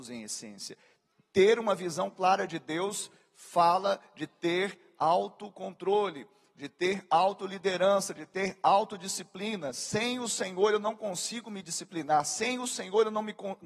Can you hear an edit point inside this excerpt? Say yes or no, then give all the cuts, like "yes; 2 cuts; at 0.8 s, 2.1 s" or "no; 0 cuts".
no; 0 cuts